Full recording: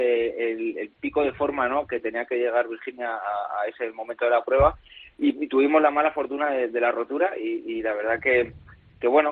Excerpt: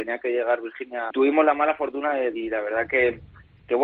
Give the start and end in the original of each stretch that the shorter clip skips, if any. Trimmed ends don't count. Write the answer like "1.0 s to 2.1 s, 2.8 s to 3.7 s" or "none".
3.2 s to 5.5 s, 6.7 s to 7.7 s